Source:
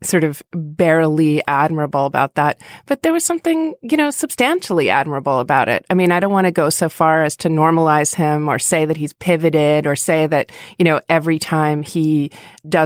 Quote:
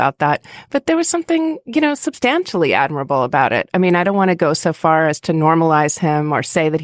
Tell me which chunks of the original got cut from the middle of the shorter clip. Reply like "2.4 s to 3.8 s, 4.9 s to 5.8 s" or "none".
none